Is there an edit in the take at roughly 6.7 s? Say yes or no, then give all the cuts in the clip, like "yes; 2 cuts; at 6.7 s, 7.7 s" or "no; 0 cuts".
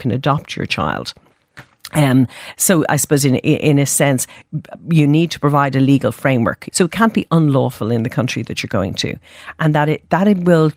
yes; 1 cut; at 6.7 s